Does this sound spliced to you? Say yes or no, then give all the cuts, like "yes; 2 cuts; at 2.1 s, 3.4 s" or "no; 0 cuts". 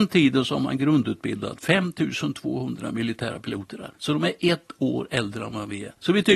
yes; 1 cut; at 3.9 s